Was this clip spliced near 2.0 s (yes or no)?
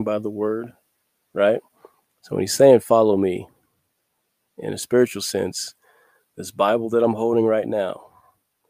yes